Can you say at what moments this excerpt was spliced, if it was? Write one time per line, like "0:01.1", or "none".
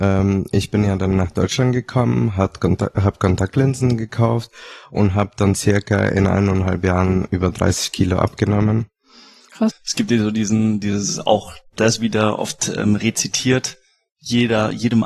0:09.7